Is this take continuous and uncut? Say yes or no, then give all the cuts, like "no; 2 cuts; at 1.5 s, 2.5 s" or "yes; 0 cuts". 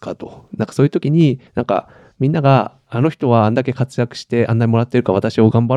no; 1 cut; at 1.5 s